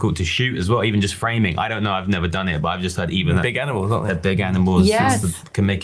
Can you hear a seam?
no; 0 cuts

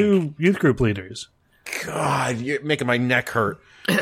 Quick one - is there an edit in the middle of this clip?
no; 0 cuts

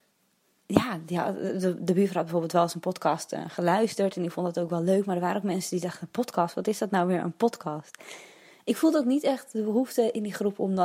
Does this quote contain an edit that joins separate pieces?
no; 0 cuts

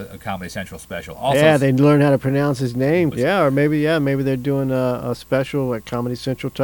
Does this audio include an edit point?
yes; 1 cut; at 3.1 s

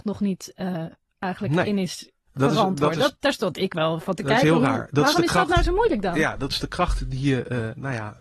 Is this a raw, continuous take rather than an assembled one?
yes; 0 cuts

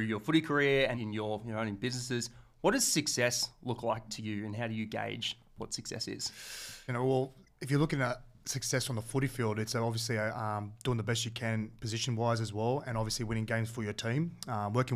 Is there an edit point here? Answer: yes; 2 cuts; at 0.9 s, 6.9 s

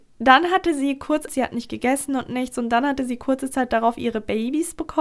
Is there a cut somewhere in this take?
yes; 1 cut; at 1.3 s

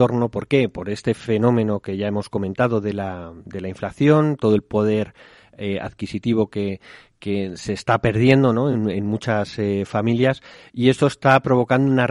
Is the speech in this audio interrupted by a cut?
no; 0 cuts

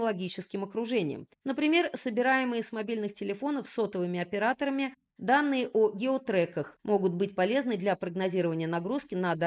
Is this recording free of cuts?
no; 1 cut; at 1.4 s

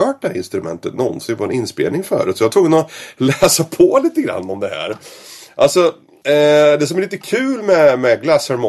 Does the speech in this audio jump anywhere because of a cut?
no; 0 cuts

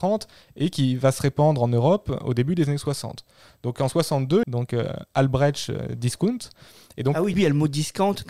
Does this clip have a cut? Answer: yes; 2 cuts; at 4.4 s, 7.3 s

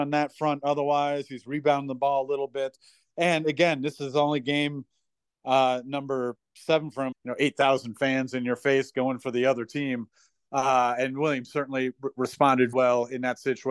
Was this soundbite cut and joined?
yes; 2 cuts; at 7.1 s, 12.7 s

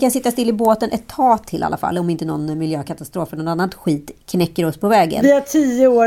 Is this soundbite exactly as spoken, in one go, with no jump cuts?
yes; 0 cuts

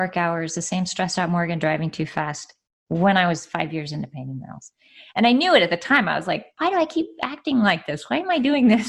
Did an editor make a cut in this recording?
no; 0 cuts

